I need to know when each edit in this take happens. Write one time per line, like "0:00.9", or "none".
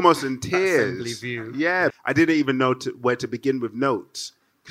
0:01.9